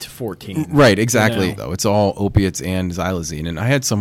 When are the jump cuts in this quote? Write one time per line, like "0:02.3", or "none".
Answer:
0:01.6